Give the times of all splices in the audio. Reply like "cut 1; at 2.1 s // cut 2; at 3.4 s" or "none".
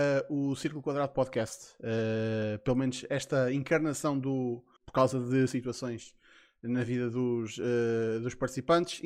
cut 1; at 4.8 s